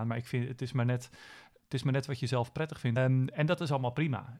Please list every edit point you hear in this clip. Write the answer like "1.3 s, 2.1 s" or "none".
1.6 s, 3.0 s